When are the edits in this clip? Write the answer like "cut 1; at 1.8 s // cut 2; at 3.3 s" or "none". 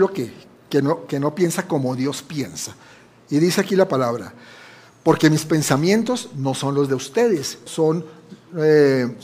cut 1; at 7.7 s